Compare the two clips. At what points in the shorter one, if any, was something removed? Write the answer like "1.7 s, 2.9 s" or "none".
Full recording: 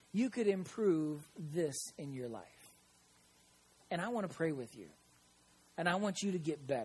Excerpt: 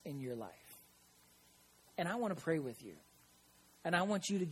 none